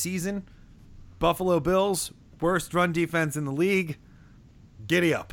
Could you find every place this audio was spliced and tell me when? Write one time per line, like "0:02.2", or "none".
none